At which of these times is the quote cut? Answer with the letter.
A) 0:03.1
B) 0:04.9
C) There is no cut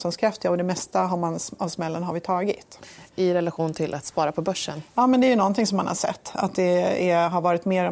A